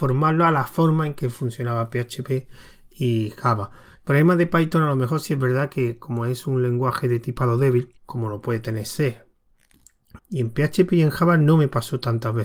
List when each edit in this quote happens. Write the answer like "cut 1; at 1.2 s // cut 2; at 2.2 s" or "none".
cut 1; at 3.9 s // cut 2; at 8.0 s // cut 3; at 10.2 s